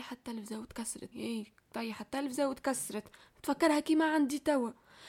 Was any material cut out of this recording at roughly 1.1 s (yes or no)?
yes